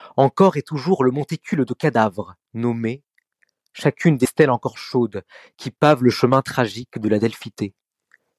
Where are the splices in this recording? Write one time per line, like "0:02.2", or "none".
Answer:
0:02.4